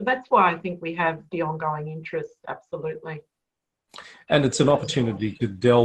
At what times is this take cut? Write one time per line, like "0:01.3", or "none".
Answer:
none